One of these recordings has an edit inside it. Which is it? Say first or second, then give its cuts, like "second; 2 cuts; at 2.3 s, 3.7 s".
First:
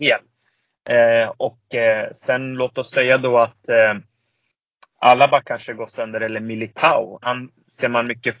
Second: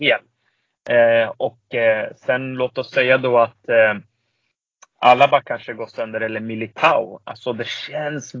first; 1 cut; at 7.2 s